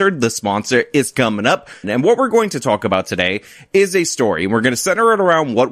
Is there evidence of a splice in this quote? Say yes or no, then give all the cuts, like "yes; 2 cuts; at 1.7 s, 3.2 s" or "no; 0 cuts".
yes; 1 cut; at 1.8 s